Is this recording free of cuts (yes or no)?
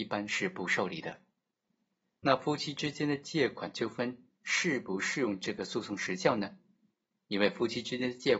yes